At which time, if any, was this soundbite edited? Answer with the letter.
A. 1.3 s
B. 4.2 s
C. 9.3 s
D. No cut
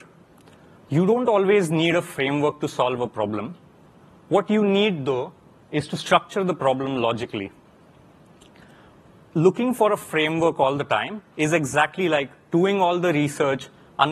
D